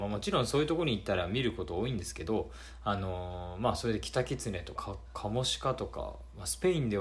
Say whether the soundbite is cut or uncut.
cut